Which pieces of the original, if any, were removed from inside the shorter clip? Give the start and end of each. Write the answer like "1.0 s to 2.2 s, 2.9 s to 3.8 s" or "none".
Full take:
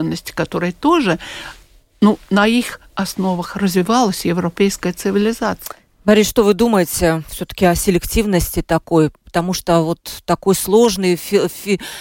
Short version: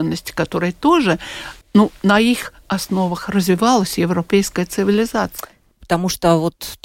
1.6 s to 1.9 s, 6.0 s to 9.2 s